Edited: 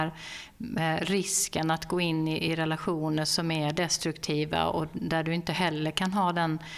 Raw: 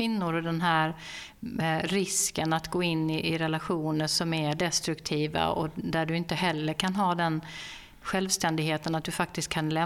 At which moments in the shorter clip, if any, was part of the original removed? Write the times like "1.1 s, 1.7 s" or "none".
none